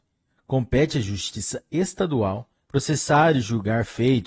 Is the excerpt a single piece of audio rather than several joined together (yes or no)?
no